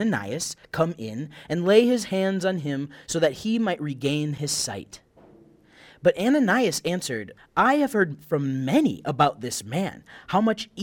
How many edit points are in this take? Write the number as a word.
one